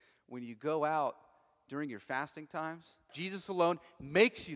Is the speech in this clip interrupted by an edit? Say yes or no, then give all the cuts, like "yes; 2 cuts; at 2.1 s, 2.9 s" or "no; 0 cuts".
yes; 1 cut; at 3.1 s